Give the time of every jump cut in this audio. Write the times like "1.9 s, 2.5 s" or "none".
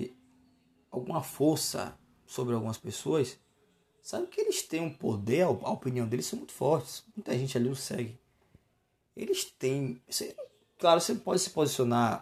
10.0 s